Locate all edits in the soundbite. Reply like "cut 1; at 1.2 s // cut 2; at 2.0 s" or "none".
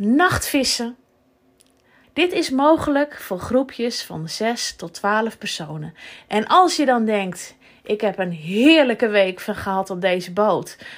cut 1; at 2.0 s